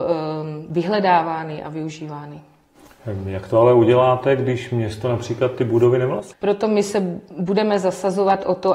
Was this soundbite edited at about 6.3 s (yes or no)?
yes